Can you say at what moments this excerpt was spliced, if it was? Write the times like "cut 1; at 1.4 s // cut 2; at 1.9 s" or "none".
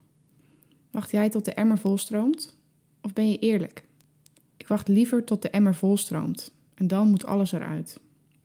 cut 1; at 4.6 s